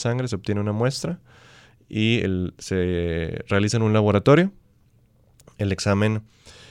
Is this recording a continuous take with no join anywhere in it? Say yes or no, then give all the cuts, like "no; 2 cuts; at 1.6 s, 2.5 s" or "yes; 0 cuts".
yes; 0 cuts